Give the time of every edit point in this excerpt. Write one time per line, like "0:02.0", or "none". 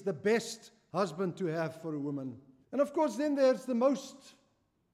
0:02.6